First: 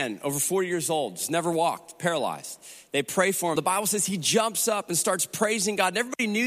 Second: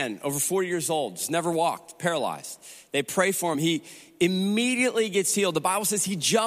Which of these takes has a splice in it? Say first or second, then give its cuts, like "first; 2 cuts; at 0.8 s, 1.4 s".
first; 1 cut; at 3.5 s